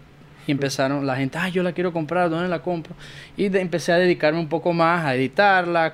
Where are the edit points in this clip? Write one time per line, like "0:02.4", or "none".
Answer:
none